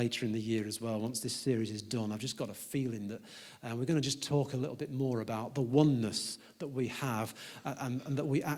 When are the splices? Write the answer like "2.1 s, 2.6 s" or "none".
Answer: none